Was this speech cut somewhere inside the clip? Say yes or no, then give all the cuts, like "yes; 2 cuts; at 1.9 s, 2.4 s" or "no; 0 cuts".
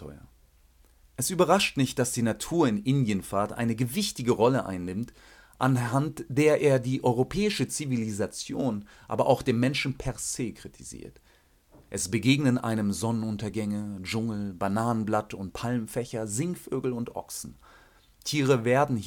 no; 0 cuts